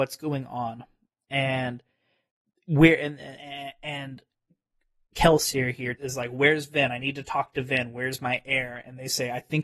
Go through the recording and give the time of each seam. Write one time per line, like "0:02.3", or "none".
0:05.9